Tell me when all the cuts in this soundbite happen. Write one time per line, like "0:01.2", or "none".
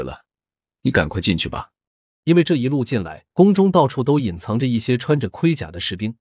0:02.2
0:03.3